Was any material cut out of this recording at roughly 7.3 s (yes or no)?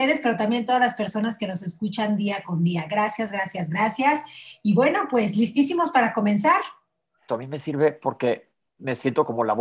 yes